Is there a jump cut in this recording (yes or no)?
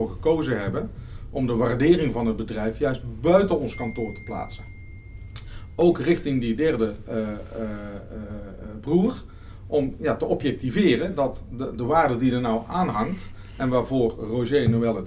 no